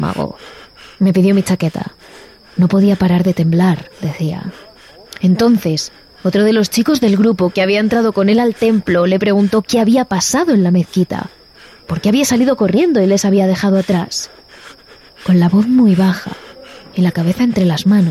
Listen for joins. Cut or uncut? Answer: uncut